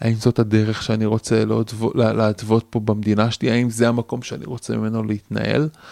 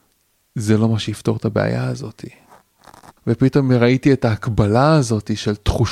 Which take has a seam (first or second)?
second